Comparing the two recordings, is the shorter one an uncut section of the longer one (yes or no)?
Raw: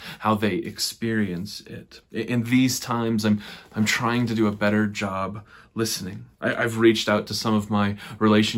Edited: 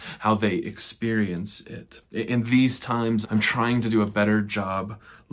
no